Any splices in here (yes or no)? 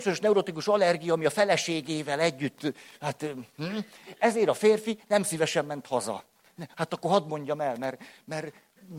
yes